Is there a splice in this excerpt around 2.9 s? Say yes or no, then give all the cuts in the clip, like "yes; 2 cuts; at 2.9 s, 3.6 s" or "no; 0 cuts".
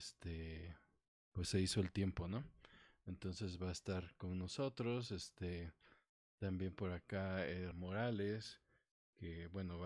no; 1 cut; at 7.7 s